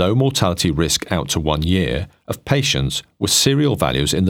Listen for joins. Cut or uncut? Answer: uncut